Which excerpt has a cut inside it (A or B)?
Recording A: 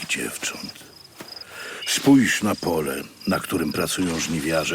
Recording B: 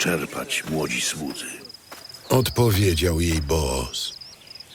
B